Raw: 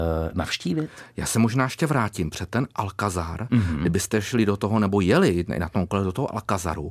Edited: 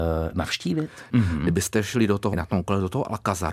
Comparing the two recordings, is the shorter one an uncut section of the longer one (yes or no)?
no